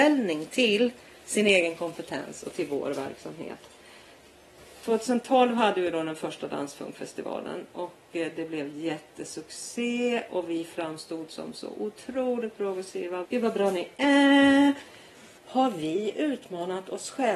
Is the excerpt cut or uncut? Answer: cut